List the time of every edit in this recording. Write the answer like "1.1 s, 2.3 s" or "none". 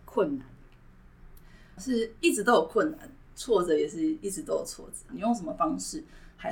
1.8 s, 5.1 s

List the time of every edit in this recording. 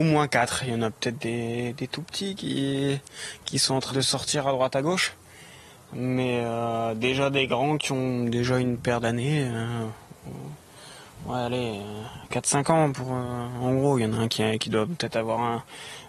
3.9 s

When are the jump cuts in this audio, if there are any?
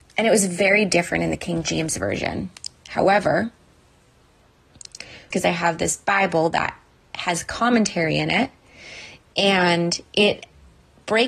5.3 s

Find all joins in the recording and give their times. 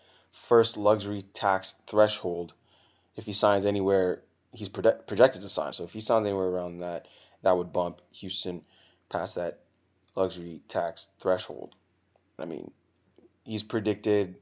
5.7 s, 12.4 s

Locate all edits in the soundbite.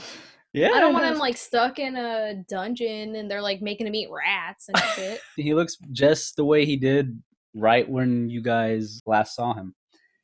5.4 s, 9.0 s

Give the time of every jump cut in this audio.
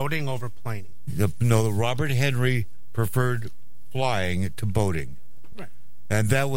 none

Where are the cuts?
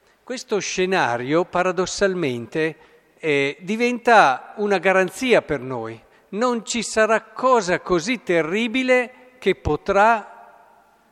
none

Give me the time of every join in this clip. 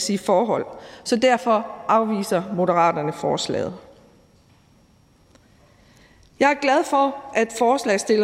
none

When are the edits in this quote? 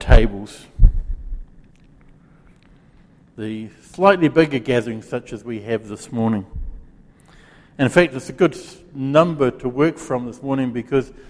none

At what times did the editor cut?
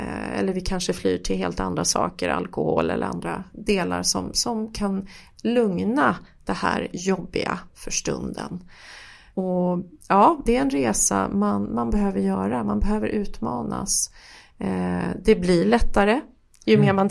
10.5 s

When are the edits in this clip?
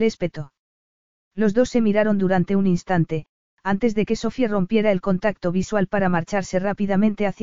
3.5 s

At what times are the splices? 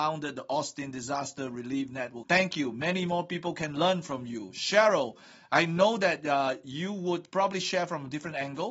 2.2 s

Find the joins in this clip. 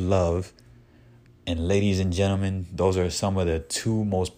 1.3 s

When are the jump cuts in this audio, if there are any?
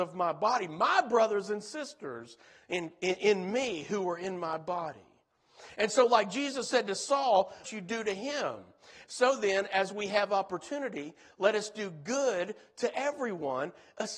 7.6 s, 9.0 s

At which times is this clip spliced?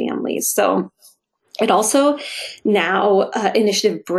none

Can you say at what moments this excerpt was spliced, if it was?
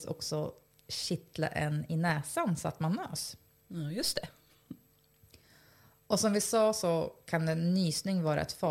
none

